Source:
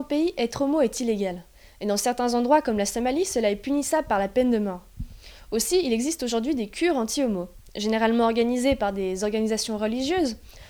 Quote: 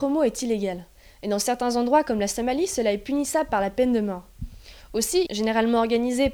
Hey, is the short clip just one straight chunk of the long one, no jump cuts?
no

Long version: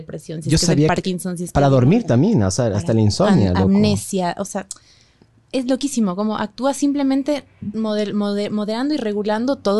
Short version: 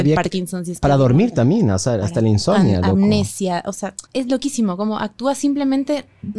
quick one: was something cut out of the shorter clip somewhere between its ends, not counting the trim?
yes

